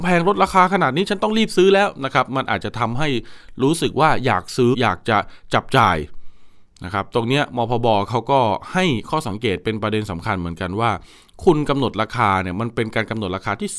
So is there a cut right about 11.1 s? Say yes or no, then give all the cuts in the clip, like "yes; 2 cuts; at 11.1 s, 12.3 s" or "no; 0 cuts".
no; 1 cut; at 4.7 s